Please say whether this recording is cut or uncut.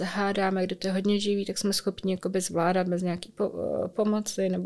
uncut